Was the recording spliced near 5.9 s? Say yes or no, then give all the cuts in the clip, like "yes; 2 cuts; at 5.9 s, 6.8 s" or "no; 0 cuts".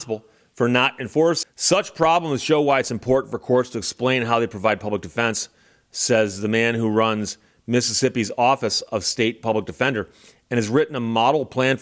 no; 1 cut; at 1.4 s